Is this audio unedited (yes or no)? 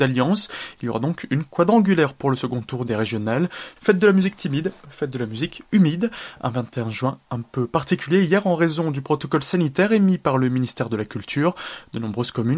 no